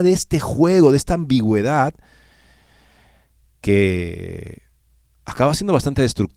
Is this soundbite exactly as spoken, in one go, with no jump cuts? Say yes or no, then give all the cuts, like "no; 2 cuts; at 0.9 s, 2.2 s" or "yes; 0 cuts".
yes; 0 cuts